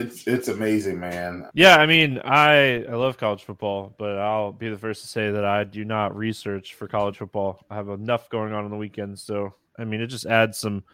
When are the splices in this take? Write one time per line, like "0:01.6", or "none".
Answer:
0:01.5